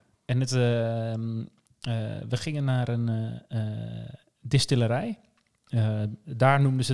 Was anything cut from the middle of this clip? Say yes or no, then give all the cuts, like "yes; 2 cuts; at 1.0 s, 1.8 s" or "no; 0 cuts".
no; 0 cuts